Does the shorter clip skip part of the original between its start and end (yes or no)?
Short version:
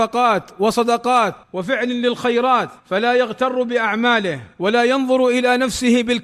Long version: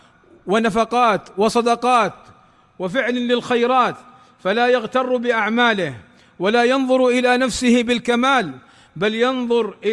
yes